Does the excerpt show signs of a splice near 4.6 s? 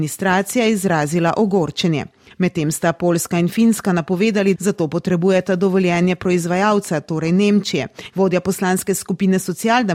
yes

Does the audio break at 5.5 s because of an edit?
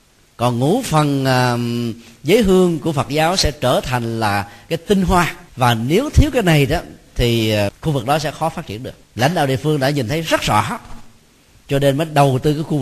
yes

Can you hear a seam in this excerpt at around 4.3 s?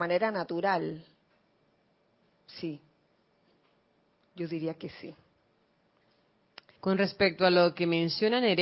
no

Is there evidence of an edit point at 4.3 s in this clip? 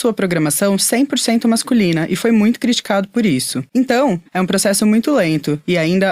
yes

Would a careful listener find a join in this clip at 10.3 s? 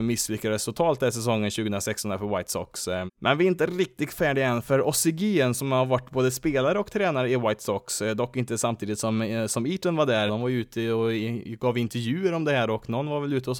yes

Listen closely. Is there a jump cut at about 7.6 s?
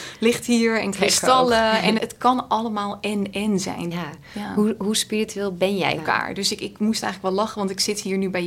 no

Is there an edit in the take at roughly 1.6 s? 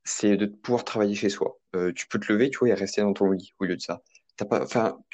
yes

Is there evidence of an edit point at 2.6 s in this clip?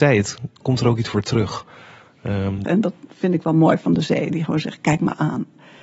yes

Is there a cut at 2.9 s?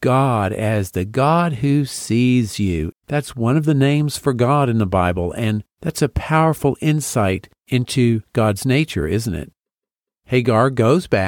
yes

